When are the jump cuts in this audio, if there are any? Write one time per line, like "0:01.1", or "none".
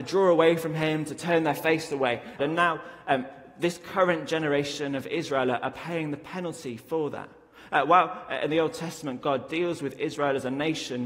0:02.4